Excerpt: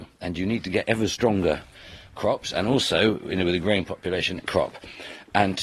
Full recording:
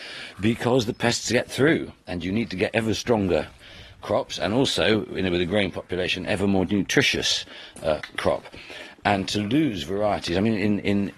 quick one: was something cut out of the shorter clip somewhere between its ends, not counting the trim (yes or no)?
yes